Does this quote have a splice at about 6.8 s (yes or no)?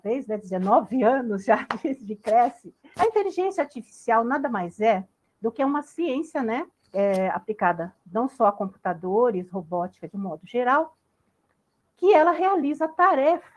no